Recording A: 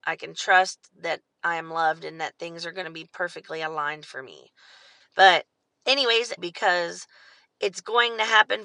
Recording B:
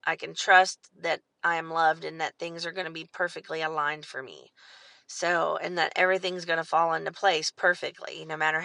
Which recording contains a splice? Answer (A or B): A